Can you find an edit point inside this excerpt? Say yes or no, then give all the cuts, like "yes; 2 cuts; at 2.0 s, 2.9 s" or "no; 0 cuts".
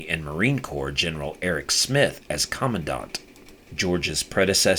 no; 0 cuts